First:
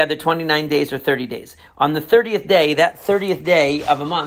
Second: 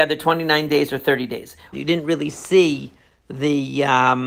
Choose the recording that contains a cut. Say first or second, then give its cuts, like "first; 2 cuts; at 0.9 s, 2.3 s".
second; 1 cut; at 1.7 s